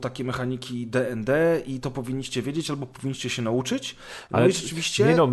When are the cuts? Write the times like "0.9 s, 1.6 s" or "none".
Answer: none